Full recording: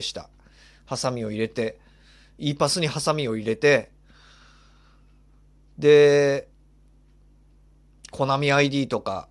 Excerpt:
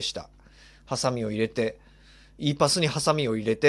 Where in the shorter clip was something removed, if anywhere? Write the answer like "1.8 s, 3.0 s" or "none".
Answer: none